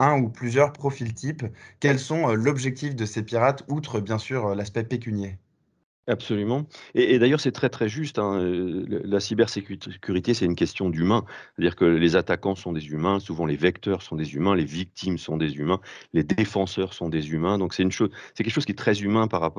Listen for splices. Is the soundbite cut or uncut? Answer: uncut